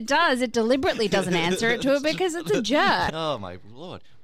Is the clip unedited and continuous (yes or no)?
no